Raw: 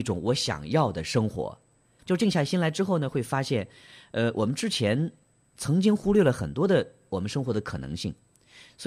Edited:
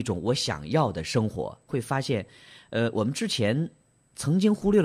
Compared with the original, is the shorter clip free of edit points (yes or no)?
no